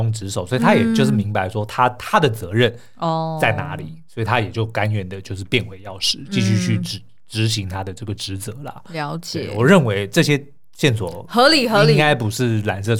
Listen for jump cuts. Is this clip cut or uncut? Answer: uncut